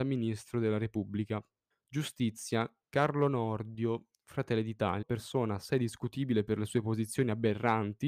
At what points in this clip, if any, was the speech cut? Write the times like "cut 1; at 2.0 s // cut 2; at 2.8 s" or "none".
cut 1; at 1.7 s // cut 2; at 5.0 s